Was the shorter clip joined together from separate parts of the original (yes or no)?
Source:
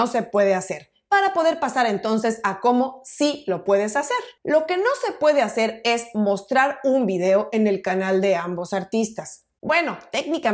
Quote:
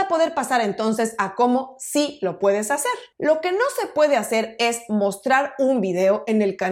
no